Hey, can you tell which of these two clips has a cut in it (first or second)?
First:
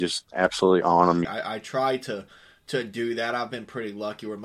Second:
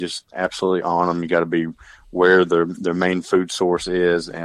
first